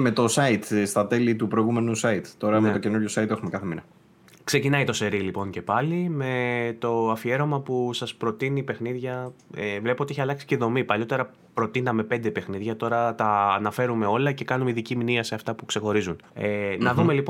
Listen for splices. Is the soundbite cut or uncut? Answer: cut